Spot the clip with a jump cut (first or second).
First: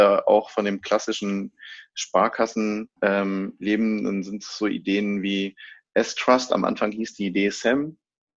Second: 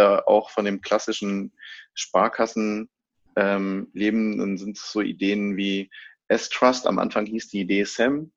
first